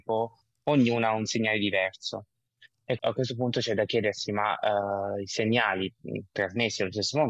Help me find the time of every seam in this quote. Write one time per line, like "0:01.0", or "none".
0:03.0